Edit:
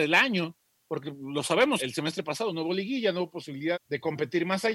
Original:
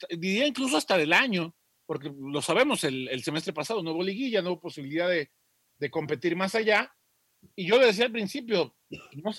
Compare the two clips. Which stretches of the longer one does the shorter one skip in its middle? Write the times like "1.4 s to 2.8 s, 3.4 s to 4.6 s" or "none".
2.8 s to 3.1 s, 5.0 s to 5.6 s